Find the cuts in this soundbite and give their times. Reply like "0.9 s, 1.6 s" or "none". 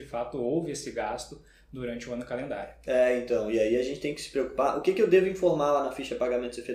none